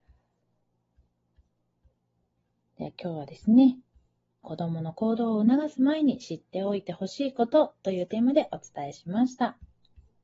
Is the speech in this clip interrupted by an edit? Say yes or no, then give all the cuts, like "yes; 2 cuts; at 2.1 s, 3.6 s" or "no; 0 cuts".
yes; 1 cut; at 4.4 s